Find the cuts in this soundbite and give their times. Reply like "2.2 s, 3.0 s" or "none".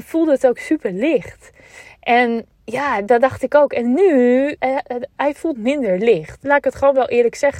2.5 s, 4.6 s